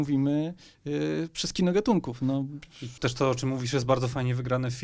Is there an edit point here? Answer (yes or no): yes